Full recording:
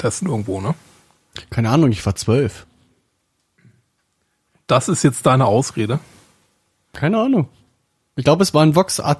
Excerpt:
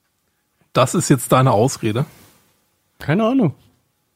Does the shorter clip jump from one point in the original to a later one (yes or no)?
no